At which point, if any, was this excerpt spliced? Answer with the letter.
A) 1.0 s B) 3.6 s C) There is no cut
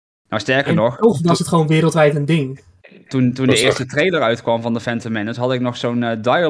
C